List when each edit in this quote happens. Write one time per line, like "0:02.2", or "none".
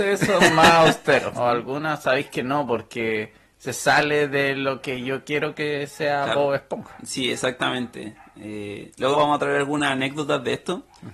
0:01.3
0:09.1